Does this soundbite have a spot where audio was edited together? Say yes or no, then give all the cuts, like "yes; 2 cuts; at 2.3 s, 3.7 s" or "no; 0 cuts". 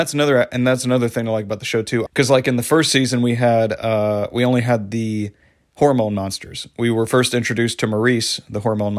yes; 1 cut; at 2.1 s